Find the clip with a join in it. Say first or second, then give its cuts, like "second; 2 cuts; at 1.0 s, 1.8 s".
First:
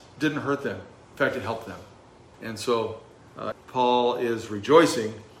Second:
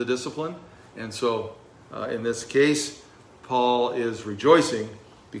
first; 2 cuts; at 2.3 s, 3.5 s